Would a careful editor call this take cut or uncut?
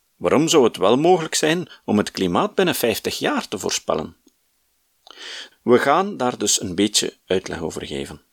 cut